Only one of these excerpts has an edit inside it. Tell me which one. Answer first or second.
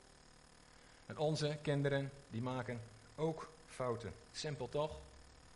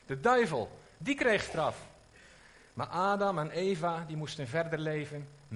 first